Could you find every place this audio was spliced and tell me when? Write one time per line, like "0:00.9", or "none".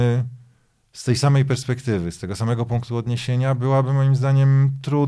none